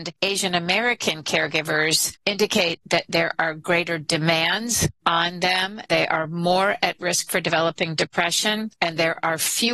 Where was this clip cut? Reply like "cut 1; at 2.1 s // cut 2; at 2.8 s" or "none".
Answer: none

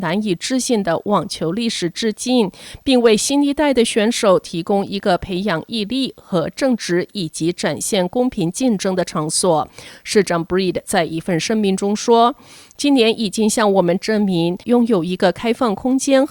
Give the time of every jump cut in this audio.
cut 1; at 14.6 s

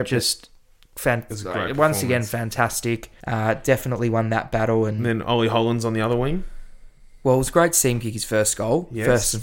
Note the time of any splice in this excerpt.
cut 1; at 3.2 s

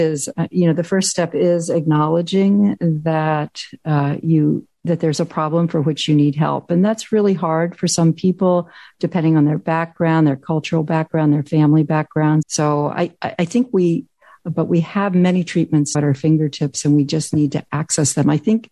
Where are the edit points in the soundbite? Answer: cut 1; at 12.4 s // cut 2; at 14.3 s // cut 3; at 15.9 s

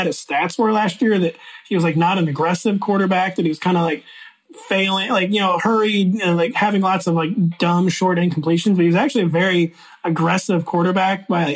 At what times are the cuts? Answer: none

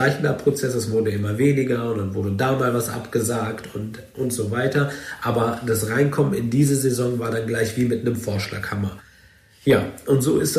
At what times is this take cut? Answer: none

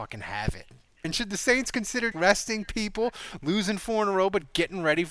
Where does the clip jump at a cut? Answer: cut 1; at 1.0 s // cut 2; at 2.1 s

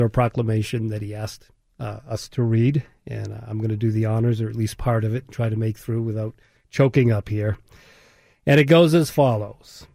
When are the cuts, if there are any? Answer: none

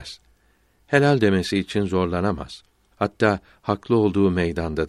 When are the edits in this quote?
cut 1; at 2.9 s

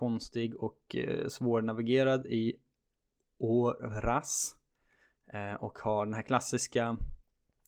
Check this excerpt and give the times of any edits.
none

